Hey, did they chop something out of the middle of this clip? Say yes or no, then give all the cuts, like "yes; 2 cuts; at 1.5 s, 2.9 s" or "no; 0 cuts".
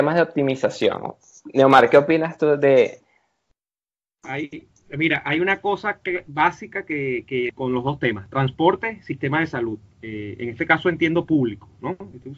yes; 1 cut; at 7.5 s